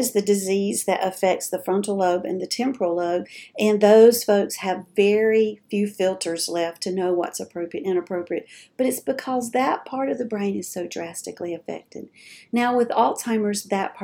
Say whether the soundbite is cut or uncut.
uncut